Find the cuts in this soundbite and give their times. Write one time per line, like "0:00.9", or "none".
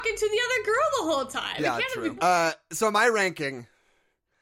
0:02.2